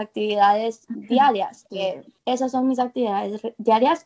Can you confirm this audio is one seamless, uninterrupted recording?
no; 1 cut; at 2.2 s

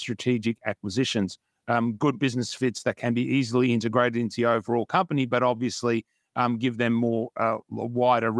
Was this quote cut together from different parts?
no; 0 cuts

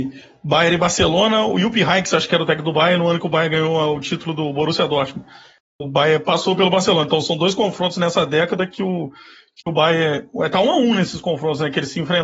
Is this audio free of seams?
yes; 0 cuts

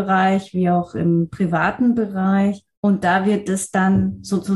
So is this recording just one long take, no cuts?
yes; 0 cuts

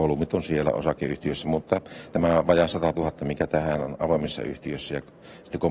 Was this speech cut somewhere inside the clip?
no; 0 cuts

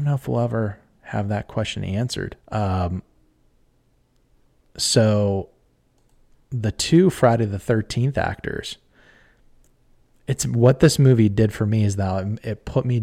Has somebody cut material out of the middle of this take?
yes; 1 cut; at 2.4 s

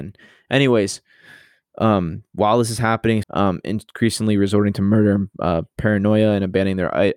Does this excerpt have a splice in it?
yes; 1 cut; at 3.2 s

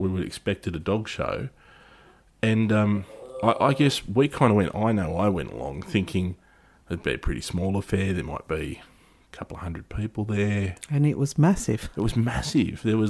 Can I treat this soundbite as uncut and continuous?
yes; 0 cuts

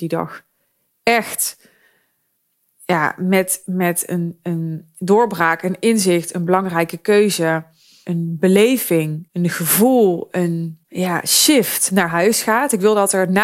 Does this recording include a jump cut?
no; 0 cuts

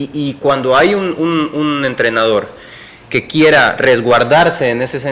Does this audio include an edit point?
no; 0 cuts

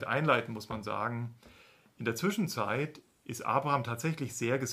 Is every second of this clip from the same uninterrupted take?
yes; 0 cuts

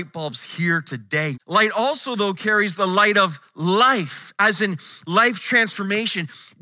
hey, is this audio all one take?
no; 1 cut; at 1.3 s

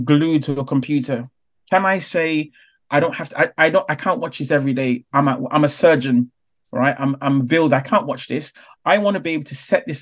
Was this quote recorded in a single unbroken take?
yes; 0 cuts

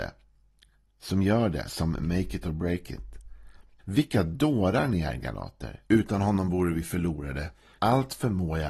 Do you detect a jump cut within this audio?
yes; 3 cuts; at 3.8 s, 5.8 s, 7.8 s

